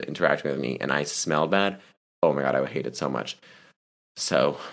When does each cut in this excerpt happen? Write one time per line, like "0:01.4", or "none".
0:02.1